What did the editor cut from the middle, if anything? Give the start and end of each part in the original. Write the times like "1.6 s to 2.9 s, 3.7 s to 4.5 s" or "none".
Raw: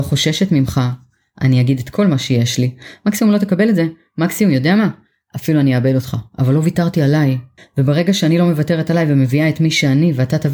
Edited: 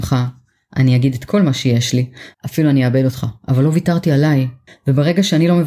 3.0 s to 5.2 s